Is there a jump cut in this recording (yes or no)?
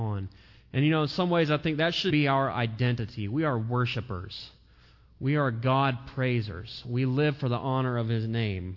yes